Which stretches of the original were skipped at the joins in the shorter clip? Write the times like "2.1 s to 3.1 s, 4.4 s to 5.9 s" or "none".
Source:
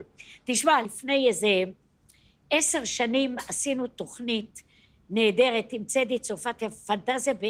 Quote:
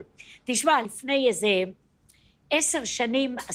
none